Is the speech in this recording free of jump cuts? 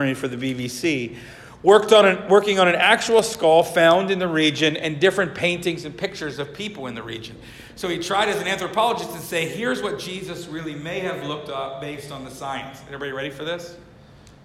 yes; 0 cuts

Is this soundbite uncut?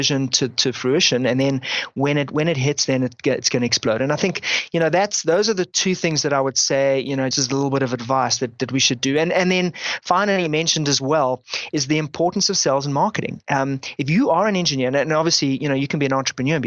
no; 1 cut; at 7.3 s

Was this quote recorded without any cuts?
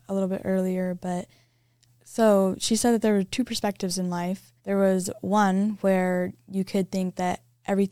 no; 1 cut; at 4.6 s

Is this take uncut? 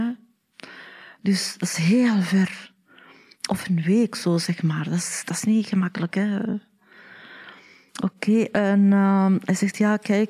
yes; 0 cuts

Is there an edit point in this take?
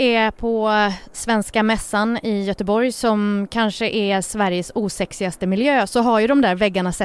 no; 0 cuts

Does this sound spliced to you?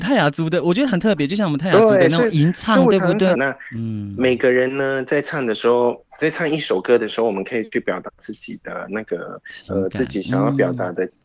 yes; 1 cut; at 3.3 s

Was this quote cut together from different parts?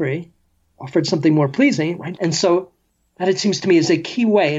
yes; 1 cut; at 2.2 s

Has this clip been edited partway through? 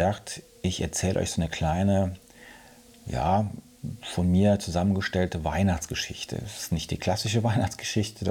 no; 0 cuts

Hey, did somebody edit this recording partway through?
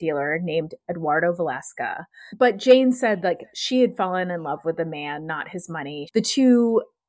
yes; 2 cuts; at 2.3 s, 6.1 s

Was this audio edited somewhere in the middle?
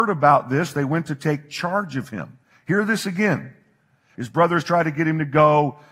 yes; 1 cut; at 4.1 s

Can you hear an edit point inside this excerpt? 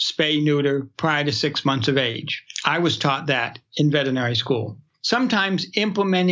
yes; 1 cut; at 4.9 s

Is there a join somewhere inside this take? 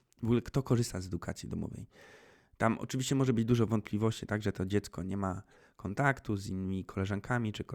no; 0 cuts

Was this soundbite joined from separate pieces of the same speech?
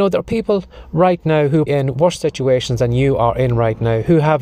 yes; 1 cut; at 1.7 s

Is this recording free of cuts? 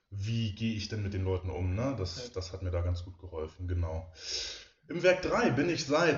yes; 0 cuts

